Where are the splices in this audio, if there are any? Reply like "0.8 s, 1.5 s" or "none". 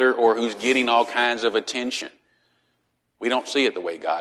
3.0 s